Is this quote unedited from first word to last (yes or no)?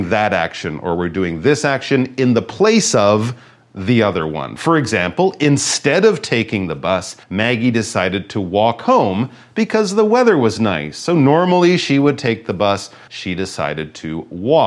no